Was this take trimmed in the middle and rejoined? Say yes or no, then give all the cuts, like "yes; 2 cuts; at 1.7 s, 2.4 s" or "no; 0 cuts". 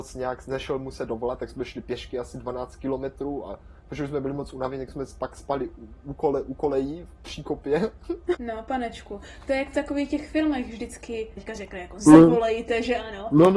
yes; 2 cuts; at 8.3 s, 11.4 s